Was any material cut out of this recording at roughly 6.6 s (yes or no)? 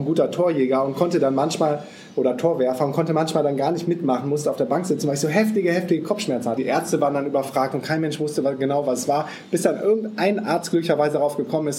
yes